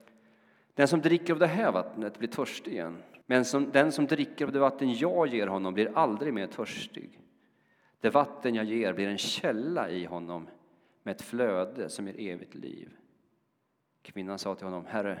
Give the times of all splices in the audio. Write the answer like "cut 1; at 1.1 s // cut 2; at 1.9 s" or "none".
cut 1; at 3.2 s

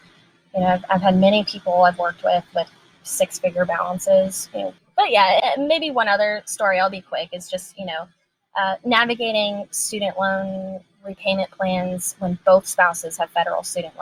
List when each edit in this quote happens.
cut 1; at 5.4 s

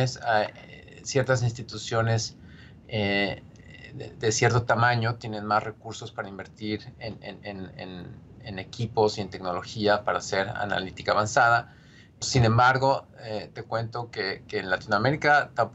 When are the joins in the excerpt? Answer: cut 1; at 12.2 s // cut 2; at 14.6 s

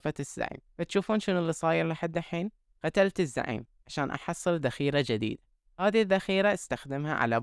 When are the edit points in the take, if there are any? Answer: none

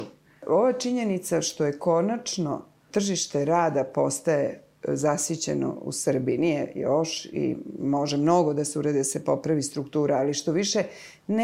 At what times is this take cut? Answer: none

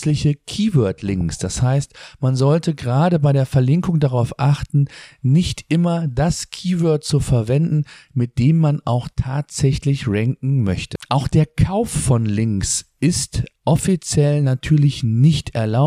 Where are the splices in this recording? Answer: none

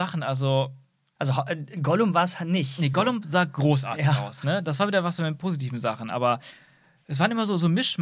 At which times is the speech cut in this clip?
none

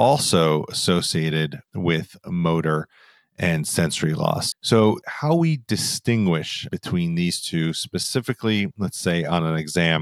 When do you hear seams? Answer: cut 1; at 4.5 s

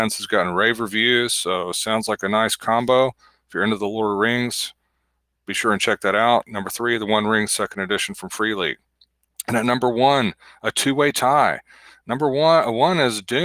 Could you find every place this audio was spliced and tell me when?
none

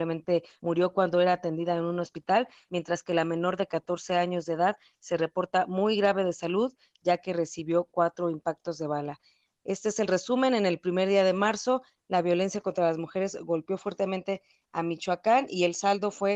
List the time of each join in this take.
none

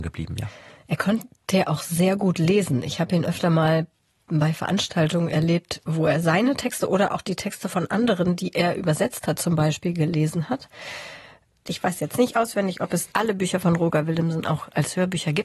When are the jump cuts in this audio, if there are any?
cut 1; at 11.7 s

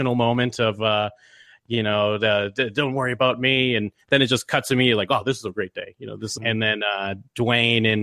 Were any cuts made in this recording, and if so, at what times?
cut 1; at 6.4 s

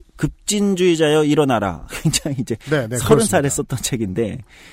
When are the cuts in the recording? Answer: none

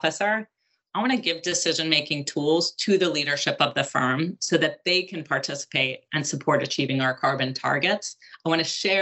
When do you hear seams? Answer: none

